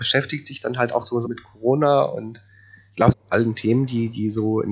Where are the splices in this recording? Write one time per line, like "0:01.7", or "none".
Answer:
0:01.2
0:03.1